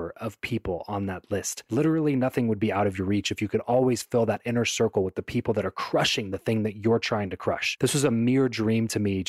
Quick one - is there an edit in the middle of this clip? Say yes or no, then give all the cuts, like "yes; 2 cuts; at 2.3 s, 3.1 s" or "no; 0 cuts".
no; 0 cuts